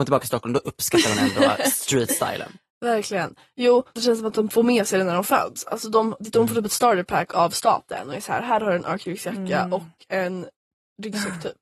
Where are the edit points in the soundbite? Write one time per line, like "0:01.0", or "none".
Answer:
0:04.0